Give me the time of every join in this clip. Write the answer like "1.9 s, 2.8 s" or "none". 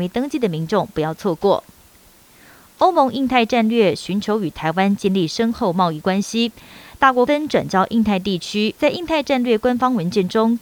7.3 s, 8.8 s